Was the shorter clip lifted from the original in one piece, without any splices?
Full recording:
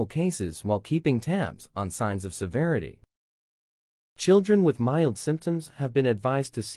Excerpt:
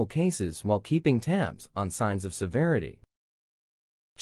yes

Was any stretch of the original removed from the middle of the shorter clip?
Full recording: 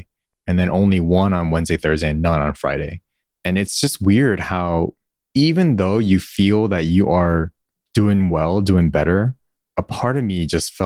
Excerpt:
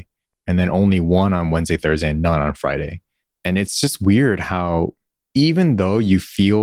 no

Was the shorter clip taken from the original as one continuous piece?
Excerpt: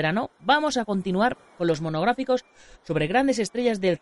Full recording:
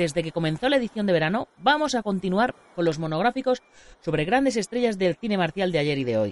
yes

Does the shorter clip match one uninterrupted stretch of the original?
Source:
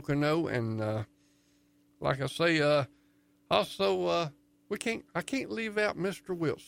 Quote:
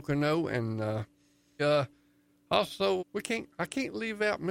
no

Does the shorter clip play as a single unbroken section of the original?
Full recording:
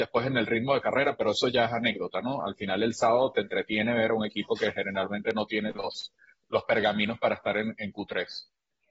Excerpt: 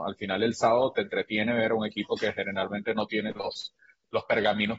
yes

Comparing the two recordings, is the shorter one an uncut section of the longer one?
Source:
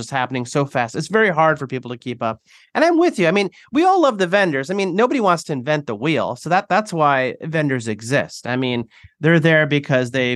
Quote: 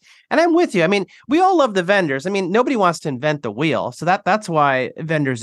yes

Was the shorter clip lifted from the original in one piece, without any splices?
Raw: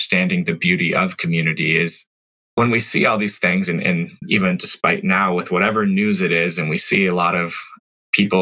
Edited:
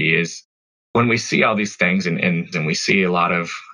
no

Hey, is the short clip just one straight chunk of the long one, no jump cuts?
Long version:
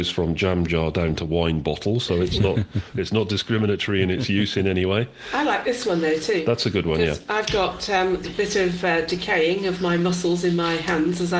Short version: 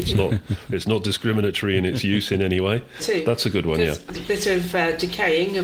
no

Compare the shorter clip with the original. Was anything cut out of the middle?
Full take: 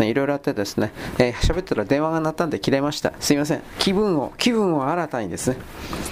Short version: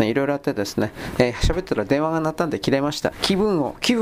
yes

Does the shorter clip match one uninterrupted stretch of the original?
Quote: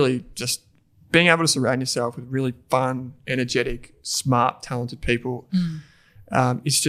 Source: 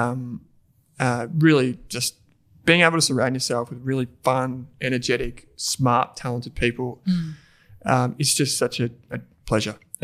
yes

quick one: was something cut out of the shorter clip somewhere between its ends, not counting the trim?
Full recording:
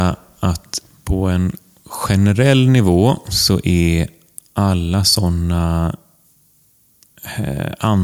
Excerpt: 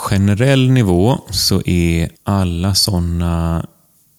yes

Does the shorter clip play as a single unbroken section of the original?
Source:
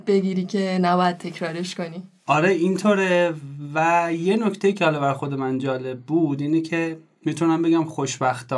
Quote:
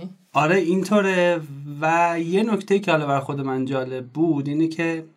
yes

